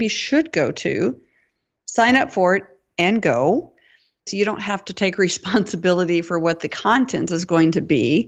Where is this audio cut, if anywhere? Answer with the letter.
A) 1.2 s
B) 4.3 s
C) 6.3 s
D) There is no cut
B